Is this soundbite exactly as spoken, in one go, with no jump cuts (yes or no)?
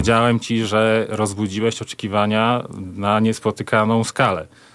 yes